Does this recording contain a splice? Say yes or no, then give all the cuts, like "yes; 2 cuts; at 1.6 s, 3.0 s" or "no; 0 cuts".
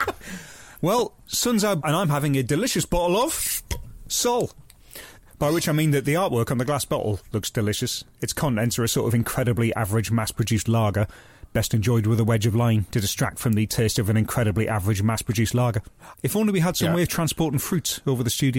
yes; 2 cuts; at 1.8 s, 16.1 s